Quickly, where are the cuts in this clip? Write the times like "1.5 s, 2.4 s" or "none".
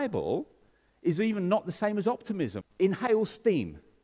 2.6 s